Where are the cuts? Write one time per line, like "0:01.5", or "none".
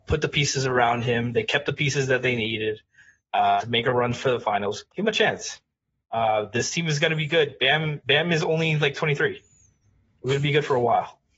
none